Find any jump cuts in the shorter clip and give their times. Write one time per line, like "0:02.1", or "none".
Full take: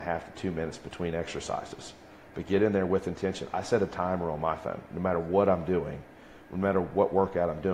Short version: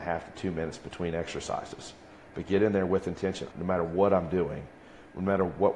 0:03.5